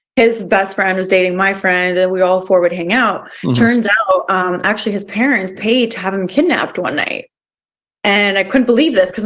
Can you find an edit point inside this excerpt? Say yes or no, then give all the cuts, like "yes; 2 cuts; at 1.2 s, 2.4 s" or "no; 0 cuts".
no; 0 cuts